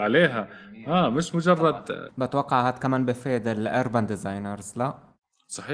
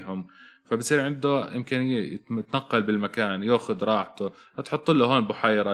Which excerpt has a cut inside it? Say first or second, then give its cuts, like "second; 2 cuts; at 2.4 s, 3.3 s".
first; 1 cut; at 2.1 s